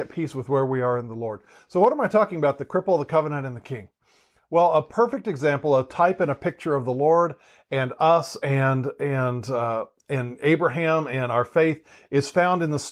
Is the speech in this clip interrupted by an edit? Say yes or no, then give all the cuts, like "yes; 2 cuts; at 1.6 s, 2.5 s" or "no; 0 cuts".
no; 0 cuts